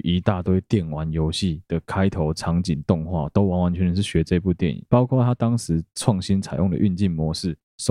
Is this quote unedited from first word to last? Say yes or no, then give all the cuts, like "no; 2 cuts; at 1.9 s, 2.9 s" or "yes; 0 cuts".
yes; 0 cuts